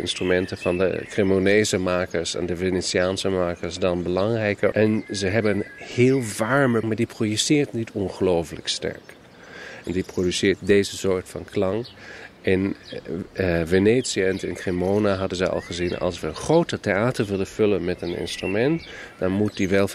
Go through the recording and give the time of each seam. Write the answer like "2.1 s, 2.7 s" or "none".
4.7 s, 6.8 s, 9.8 s